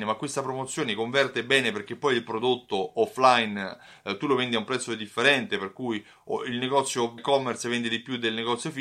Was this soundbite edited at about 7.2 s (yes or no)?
yes